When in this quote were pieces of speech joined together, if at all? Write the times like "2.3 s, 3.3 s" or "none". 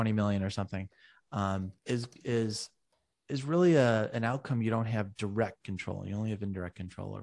1.8 s